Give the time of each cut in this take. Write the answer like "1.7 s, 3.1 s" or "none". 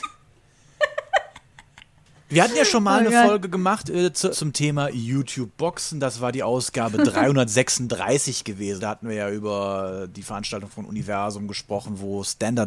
4.3 s, 8.8 s